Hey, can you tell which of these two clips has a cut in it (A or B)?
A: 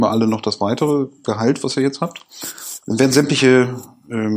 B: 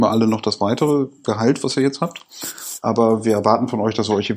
A